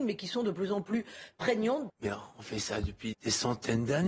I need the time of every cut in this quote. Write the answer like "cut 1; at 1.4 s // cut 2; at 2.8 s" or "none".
cut 1; at 1.9 s // cut 2; at 3.1 s